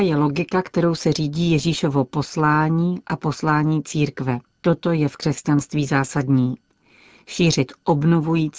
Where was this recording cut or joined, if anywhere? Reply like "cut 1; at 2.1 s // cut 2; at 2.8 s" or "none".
cut 1; at 4.6 s